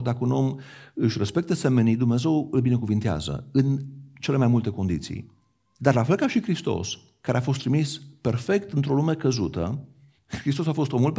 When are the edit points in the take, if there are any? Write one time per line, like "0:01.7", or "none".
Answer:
none